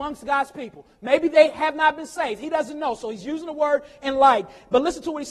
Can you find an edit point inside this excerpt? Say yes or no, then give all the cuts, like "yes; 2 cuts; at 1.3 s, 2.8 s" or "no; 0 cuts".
no; 0 cuts